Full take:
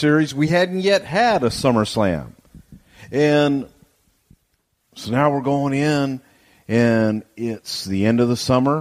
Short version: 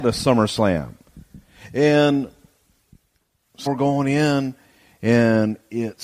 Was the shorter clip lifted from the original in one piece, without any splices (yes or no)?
no